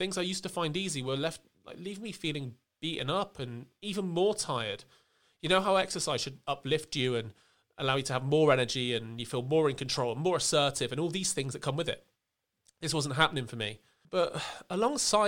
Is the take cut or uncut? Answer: cut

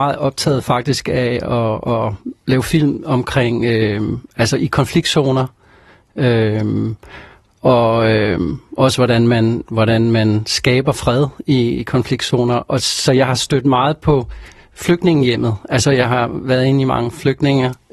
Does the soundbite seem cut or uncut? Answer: uncut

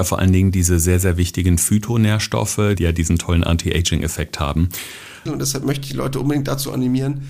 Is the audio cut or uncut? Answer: cut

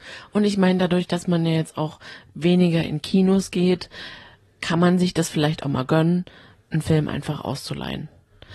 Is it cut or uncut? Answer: uncut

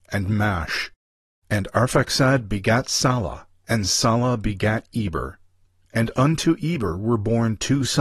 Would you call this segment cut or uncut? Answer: uncut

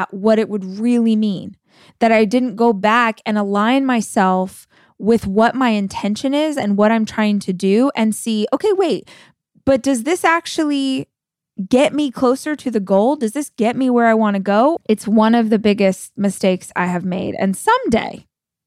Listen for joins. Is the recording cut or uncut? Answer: cut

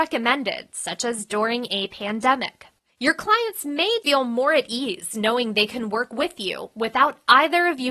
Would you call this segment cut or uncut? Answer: cut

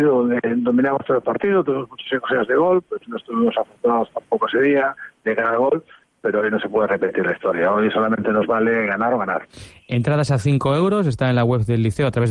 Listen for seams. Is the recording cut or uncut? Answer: uncut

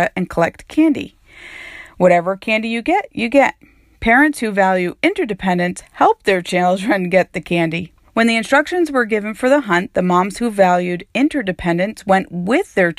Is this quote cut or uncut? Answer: cut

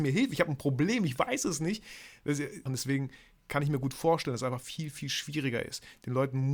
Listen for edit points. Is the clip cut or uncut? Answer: cut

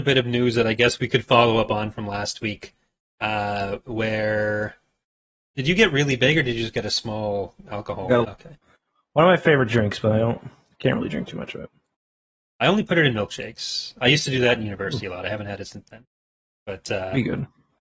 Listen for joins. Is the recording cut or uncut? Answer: cut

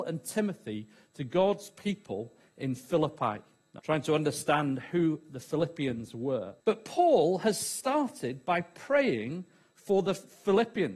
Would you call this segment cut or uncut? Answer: cut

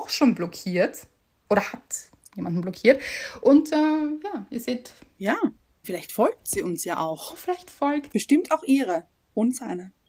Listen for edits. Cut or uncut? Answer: cut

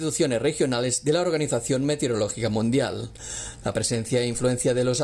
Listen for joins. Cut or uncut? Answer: uncut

